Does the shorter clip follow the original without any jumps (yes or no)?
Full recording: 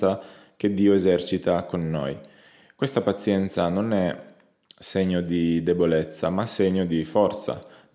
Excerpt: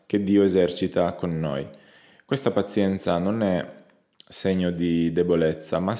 yes